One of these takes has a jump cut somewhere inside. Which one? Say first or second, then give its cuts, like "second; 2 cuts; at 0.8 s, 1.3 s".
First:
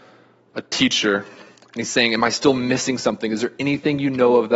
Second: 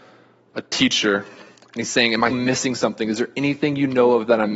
second; 1 cut; at 2.3 s